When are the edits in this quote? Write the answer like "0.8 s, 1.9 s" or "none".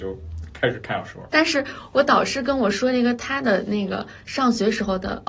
1.3 s